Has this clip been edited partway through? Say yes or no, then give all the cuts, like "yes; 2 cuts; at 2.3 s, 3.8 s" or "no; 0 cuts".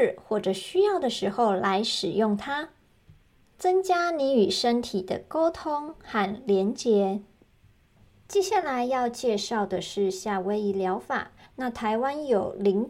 yes; 1 cut; at 11.4 s